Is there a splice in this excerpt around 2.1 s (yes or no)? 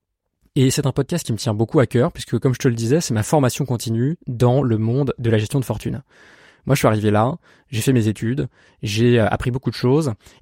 no